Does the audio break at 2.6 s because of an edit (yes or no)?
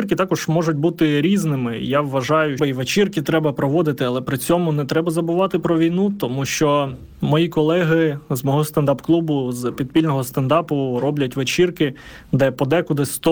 yes